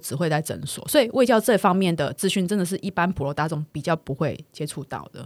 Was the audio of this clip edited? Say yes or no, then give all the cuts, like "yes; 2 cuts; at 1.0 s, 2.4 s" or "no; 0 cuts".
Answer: no; 0 cuts